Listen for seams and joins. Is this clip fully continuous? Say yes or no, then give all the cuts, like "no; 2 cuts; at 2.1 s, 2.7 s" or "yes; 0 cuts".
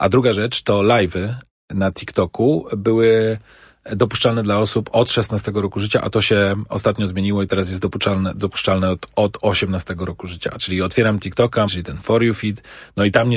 no; 2 cuts; at 10.6 s, 11.7 s